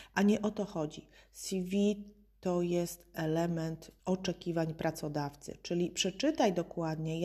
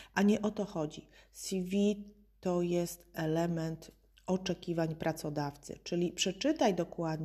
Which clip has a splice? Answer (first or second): first